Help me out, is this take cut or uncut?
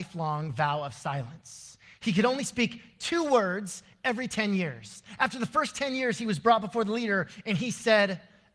uncut